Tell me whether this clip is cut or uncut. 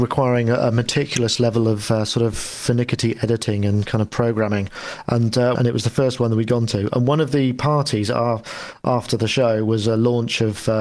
cut